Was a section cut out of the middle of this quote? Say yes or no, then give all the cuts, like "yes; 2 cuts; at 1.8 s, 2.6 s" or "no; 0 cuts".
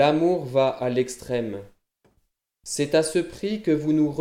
no; 0 cuts